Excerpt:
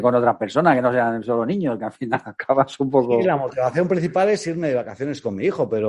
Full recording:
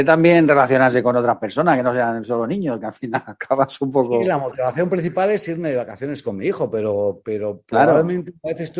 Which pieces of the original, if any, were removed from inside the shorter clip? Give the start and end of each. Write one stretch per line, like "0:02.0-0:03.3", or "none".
none